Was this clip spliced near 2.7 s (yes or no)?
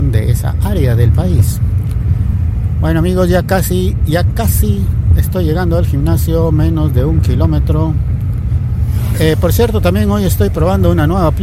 no